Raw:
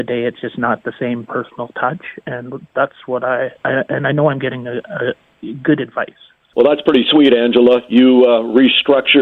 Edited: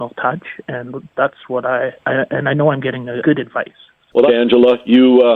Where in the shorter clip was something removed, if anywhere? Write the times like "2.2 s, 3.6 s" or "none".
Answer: 3.2 s, 4.3 s